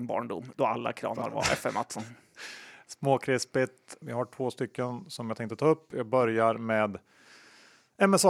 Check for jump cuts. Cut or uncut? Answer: cut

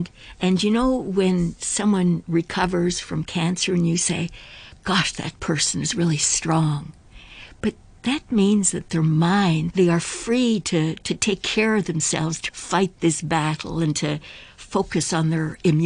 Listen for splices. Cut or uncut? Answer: cut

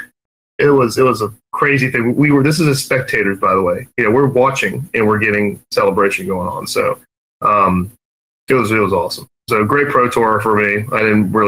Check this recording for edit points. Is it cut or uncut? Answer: uncut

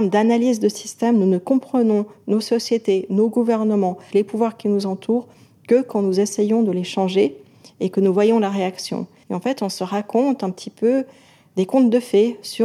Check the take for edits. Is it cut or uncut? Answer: cut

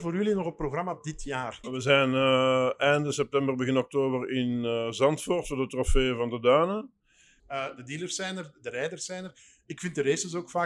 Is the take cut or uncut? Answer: cut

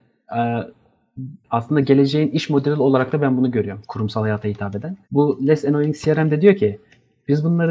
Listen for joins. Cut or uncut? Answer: cut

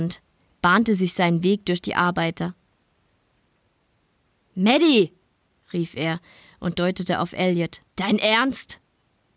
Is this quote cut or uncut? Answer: cut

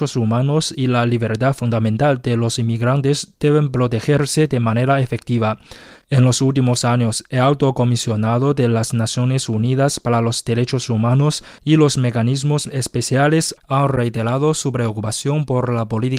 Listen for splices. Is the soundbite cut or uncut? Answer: uncut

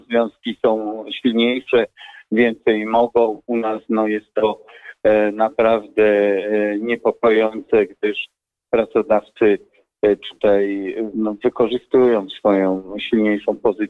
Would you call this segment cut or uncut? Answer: uncut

